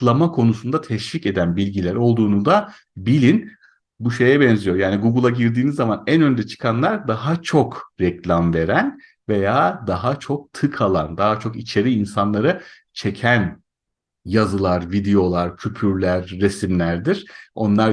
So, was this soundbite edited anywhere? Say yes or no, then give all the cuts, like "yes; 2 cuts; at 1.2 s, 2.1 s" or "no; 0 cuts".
no; 0 cuts